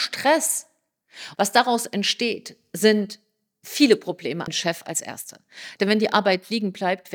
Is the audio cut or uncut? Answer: cut